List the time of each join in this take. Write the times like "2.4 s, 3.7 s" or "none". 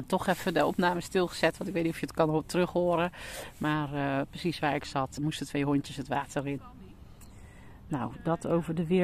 5.2 s, 6.6 s